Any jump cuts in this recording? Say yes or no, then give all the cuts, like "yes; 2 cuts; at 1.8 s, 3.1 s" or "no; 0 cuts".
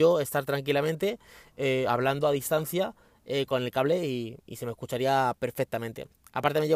no; 0 cuts